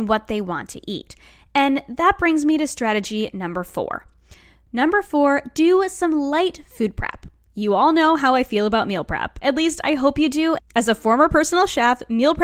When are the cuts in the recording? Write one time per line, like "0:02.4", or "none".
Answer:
0:10.6